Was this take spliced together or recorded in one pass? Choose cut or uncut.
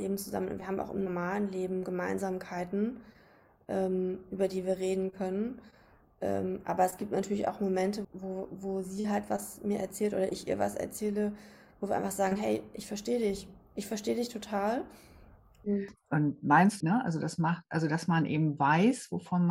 cut